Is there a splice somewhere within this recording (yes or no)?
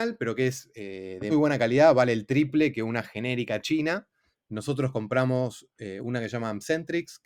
yes